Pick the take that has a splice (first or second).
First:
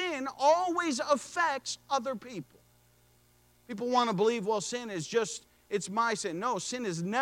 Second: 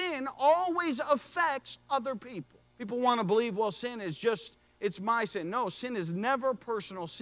second